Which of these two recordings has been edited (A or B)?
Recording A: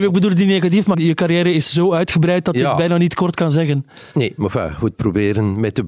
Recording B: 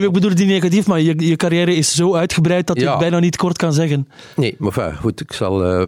A